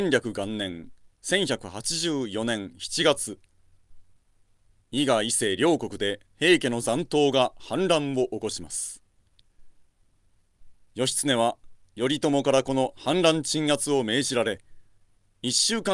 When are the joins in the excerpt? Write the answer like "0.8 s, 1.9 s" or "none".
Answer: 6.2 s